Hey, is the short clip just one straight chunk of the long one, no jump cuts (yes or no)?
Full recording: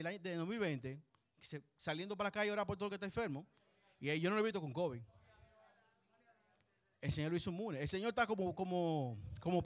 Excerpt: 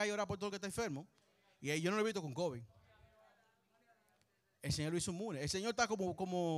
yes